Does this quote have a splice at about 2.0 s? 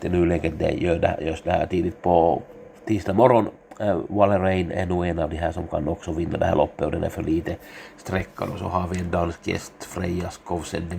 yes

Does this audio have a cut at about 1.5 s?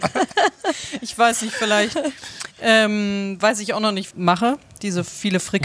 no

